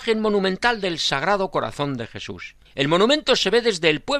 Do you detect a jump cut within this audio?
yes; 1 cut; at 2.6 s

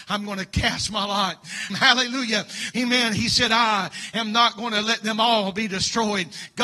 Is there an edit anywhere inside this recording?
yes; 2 cuts; at 1.7 s, 2.7 s

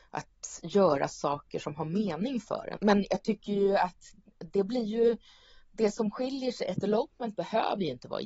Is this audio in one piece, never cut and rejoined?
no; 1 cut; at 2.8 s

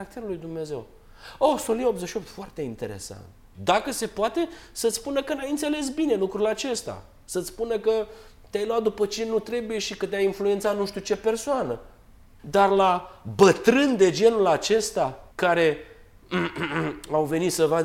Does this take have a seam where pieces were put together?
yes; 3 cuts; at 3.5 s, 12.4 s, 15.3 s

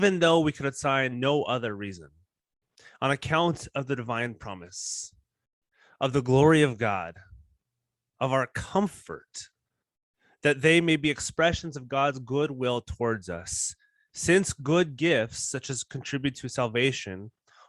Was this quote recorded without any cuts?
yes; 0 cuts

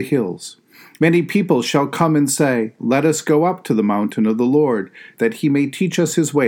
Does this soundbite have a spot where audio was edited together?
yes; 3 cuts; at 1.0 s, 2.8 s, 5.2 s

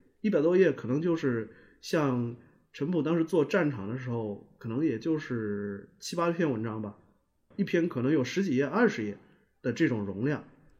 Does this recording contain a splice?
no; 0 cuts

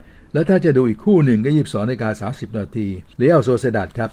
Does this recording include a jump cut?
yes; 1 cut; at 3.1 s

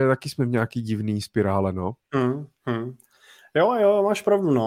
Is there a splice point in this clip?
no; 0 cuts

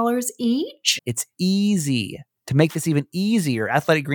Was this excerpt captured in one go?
no; 1 cut; at 1.0 s

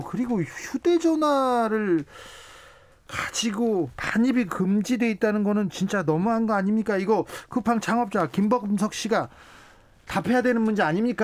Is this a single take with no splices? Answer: yes; 0 cuts

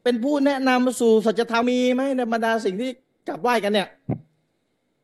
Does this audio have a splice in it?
yes; 1 cut; at 1.6 s

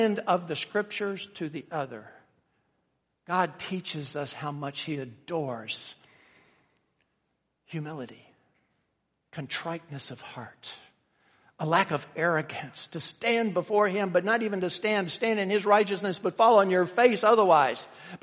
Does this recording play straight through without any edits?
yes; 0 cuts

